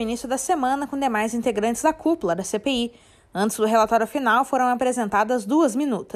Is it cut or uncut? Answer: uncut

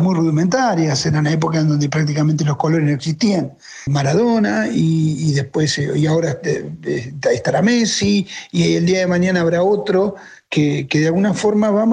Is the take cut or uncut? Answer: cut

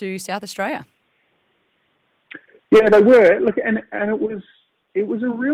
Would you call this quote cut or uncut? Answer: uncut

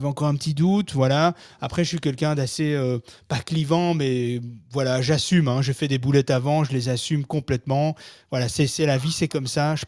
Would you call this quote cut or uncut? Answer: uncut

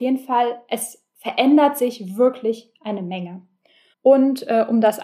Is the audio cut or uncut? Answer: cut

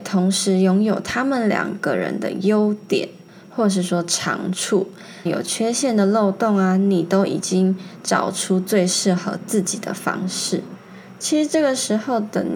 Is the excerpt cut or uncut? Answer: cut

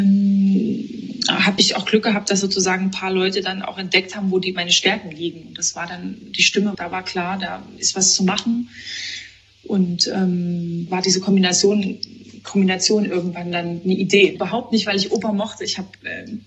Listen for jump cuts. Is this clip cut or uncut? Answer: cut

